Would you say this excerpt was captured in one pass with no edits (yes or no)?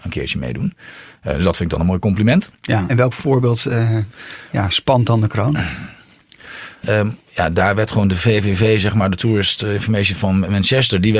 no